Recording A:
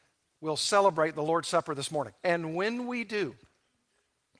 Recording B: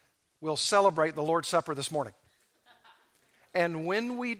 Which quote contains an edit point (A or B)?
A